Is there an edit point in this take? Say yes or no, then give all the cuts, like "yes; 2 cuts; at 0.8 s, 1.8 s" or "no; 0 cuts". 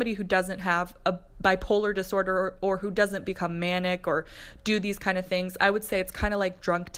no; 0 cuts